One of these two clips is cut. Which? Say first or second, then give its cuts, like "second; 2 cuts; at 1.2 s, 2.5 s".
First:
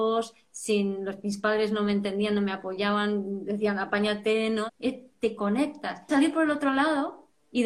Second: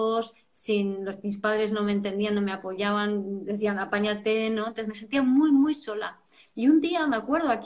first; 2 cuts; at 4.7 s, 6.1 s